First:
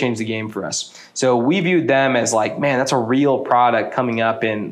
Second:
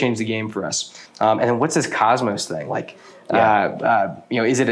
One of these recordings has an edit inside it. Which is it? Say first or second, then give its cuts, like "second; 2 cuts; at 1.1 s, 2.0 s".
second; 1 cut; at 1.1 s